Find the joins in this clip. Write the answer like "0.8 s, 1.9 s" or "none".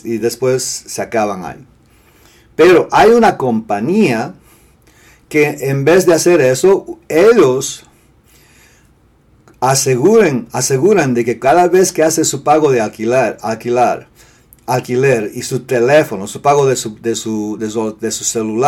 none